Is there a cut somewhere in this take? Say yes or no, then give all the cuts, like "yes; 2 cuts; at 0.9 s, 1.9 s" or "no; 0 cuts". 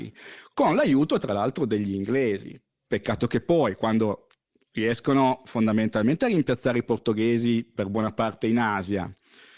no; 0 cuts